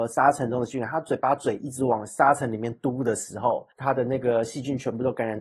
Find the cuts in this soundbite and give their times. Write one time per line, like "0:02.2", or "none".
0:03.7